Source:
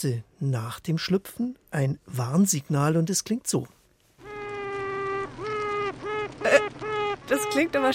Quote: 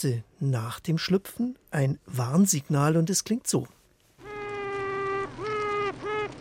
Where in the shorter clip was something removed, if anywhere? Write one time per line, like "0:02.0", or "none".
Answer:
none